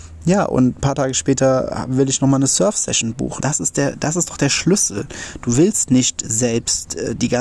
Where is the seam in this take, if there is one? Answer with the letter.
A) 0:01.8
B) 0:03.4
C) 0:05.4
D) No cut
B